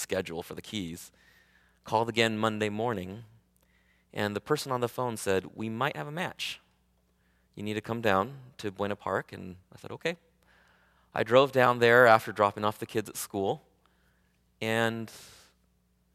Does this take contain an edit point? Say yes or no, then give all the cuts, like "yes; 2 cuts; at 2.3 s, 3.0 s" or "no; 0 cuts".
no; 0 cuts